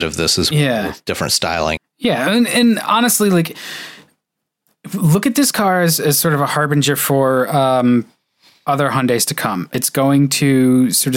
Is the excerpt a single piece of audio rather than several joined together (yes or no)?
no